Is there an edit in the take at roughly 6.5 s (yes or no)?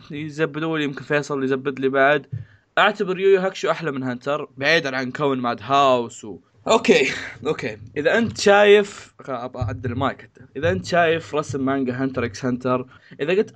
yes